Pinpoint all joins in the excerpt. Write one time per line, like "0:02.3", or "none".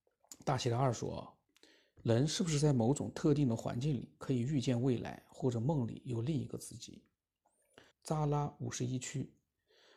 0:02.0
0:07.9